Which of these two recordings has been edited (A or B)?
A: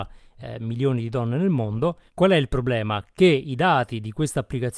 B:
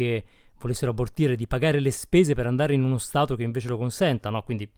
A